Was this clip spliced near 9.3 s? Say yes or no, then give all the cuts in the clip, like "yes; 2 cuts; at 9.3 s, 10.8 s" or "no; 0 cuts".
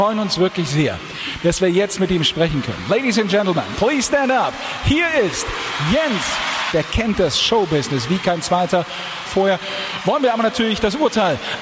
yes; 2 cuts; at 6.7 s, 9.3 s